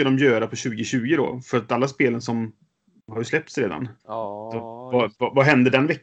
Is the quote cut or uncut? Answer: cut